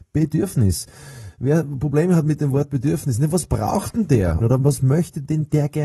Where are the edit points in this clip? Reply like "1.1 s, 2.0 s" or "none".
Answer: 4.4 s